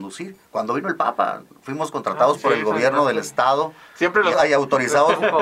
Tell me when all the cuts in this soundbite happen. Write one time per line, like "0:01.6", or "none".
0:04.3